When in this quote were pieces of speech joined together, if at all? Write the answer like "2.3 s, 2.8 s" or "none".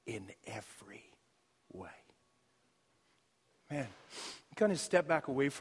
none